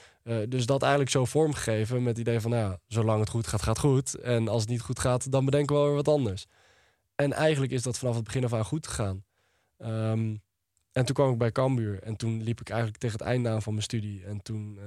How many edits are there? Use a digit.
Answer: 0